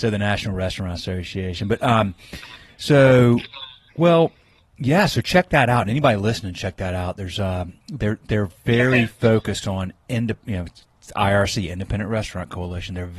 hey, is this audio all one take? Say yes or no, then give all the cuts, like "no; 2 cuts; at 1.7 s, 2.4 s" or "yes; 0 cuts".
yes; 0 cuts